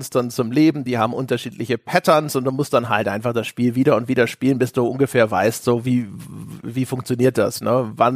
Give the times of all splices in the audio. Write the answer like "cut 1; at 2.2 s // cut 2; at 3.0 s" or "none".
none